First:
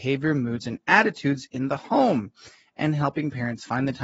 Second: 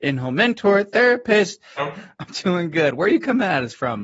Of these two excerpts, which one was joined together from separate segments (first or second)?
second